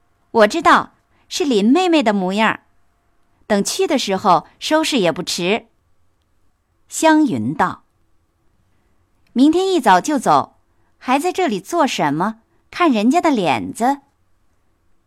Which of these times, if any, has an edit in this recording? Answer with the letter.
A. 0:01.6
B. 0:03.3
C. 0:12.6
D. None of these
B